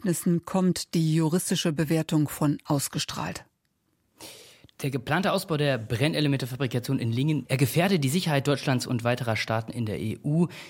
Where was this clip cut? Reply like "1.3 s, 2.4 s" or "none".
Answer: 7.4 s